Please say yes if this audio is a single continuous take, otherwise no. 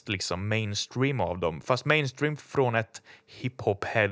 yes